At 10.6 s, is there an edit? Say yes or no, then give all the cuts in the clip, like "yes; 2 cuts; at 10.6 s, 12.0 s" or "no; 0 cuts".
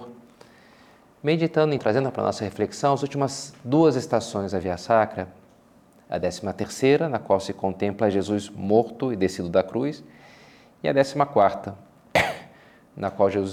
no; 1 cut; at 1.8 s